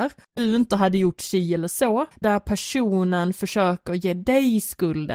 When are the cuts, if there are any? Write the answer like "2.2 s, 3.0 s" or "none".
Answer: 2.1 s